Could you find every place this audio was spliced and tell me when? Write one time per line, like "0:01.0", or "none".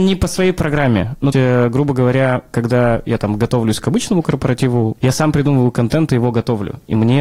0:01.3
0:05.0